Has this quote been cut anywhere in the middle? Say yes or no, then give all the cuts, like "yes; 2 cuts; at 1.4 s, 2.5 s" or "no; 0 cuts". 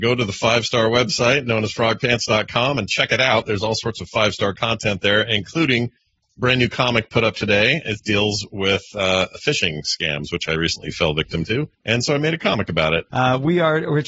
yes; 2 cuts; at 11.7 s, 13.1 s